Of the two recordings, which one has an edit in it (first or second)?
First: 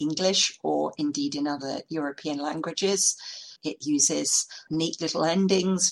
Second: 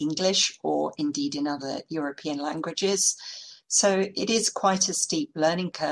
first